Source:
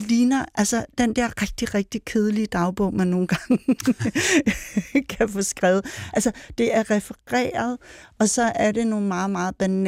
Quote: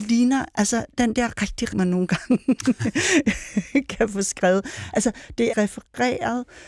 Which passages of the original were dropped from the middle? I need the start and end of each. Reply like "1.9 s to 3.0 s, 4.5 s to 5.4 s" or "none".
1.7 s to 2.9 s, 6.7 s to 6.8 s